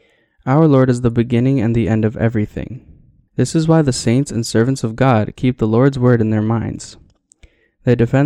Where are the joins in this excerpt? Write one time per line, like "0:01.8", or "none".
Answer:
0:03.3